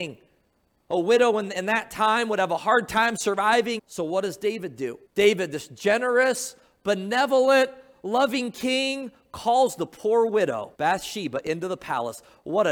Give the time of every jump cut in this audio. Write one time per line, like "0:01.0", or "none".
0:03.8
0:05.1
0:10.7